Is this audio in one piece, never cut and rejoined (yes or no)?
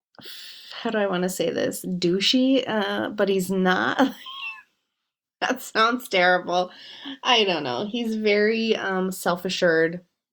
yes